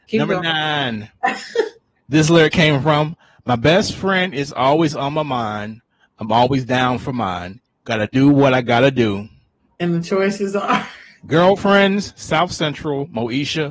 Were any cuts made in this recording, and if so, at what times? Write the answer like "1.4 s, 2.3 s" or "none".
none